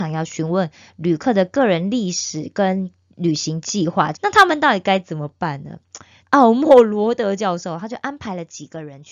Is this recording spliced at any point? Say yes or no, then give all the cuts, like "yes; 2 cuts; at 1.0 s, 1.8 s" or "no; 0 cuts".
yes; 2 cuts; at 4.1 s, 6.2 s